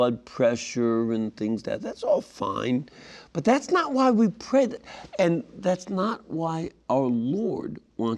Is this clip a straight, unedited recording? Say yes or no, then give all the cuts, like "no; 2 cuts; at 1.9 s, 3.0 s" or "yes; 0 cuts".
no; 1 cut; at 1.6 s